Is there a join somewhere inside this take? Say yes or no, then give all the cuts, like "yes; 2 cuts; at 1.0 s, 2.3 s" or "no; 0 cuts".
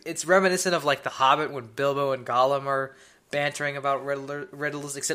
no; 0 cuts